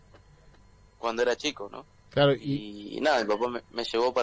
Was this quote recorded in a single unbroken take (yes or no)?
yes